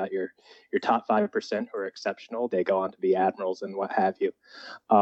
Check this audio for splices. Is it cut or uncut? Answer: cut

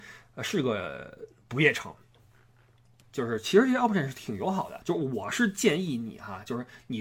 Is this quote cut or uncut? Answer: cut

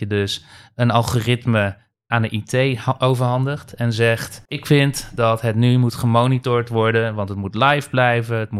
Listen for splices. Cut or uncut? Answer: cut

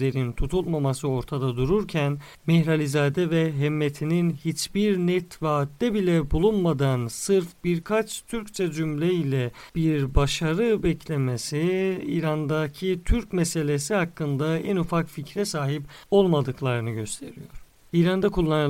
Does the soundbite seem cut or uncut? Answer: cut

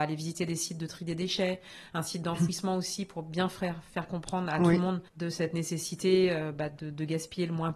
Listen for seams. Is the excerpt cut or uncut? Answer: uncut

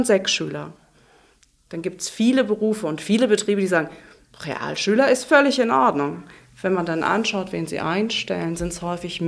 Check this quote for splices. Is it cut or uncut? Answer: uncut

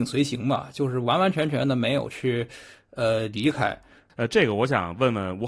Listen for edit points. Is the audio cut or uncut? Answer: cut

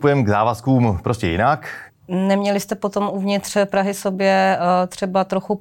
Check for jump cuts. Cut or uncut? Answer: cut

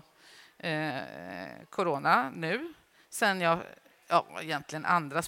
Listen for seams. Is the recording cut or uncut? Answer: uncut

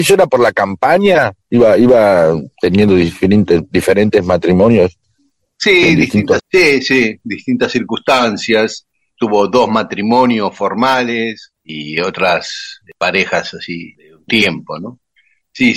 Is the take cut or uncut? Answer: cut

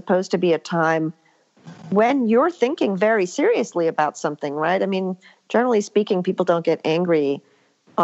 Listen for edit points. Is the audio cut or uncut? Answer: uncut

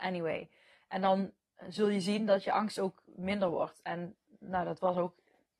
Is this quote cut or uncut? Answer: uncut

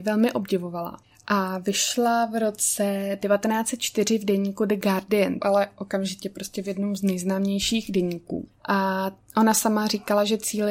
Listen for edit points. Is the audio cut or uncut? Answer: cut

